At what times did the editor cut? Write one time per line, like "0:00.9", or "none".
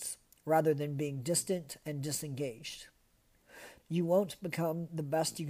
0:03.8